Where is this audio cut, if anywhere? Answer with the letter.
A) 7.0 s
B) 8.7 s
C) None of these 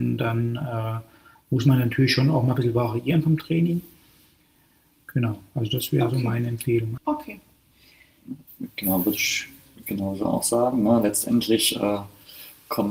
A